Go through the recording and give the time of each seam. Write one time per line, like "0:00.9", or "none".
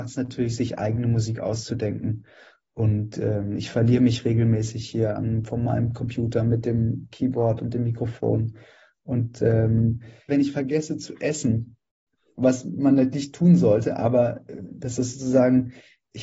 0:10.3